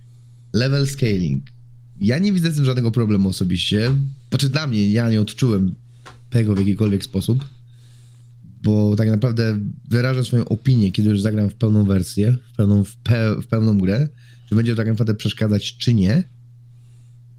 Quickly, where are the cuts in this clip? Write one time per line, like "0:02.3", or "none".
none